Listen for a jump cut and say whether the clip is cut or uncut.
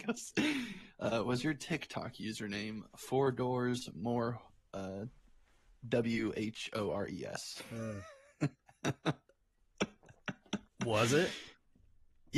uncut